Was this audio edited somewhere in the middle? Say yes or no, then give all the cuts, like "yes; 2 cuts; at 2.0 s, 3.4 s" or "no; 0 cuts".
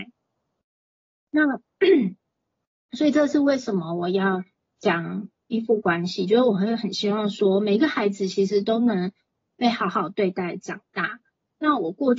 no; 0 cuts